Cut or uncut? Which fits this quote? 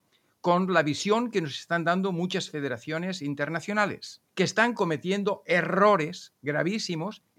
cut